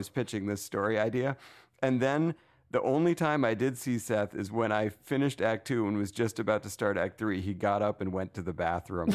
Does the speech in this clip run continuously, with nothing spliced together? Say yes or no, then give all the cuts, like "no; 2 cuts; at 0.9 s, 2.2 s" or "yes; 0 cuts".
yes; 0 cuts